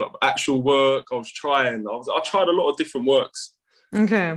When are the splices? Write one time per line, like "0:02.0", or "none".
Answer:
none